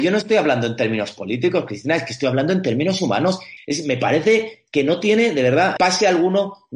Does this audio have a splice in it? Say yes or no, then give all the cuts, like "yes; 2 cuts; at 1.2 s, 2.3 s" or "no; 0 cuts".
yes; 2 cuts; at 3.6 s, 5.8 s